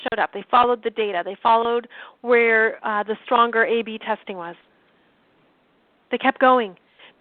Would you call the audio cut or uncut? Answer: uncut